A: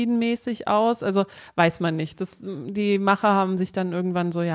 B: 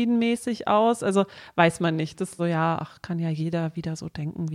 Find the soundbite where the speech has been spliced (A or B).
B